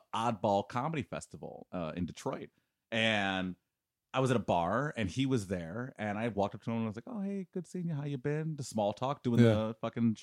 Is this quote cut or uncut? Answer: uncut